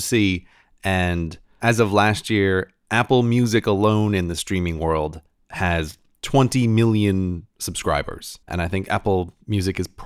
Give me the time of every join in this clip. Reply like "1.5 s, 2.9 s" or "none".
8.4 s